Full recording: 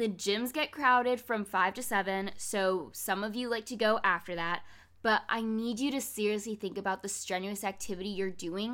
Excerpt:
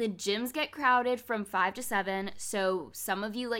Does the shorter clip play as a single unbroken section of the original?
yes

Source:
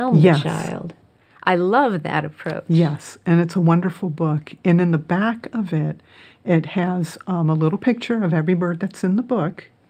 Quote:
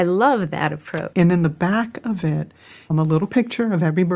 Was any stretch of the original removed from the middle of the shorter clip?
yes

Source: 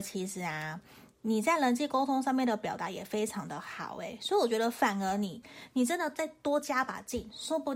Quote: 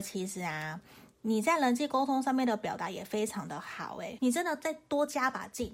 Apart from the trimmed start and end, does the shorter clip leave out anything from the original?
yes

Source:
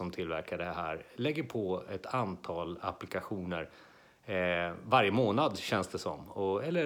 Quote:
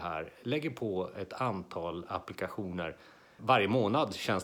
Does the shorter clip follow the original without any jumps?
no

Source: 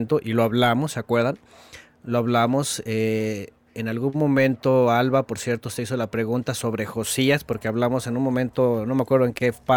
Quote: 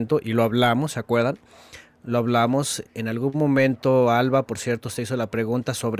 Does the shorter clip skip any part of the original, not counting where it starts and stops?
yes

